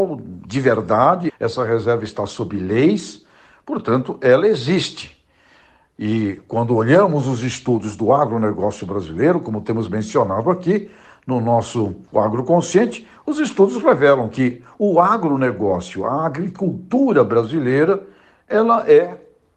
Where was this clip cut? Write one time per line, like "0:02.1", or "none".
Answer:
0:01.3